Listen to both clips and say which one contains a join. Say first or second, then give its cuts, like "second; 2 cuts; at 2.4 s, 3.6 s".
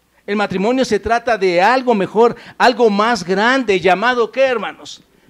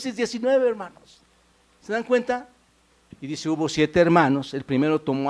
second; 1 cut; at 3.1 s